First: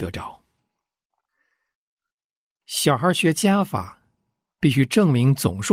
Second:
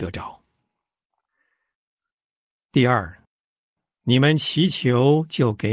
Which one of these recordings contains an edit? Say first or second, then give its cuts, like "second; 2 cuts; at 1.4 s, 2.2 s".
first; 1 cut; at 2.5 s